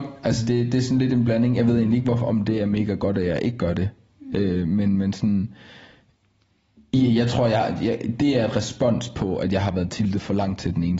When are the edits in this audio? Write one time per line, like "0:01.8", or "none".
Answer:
none